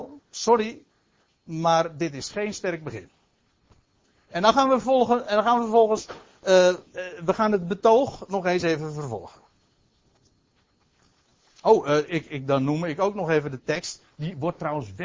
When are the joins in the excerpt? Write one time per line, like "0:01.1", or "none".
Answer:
none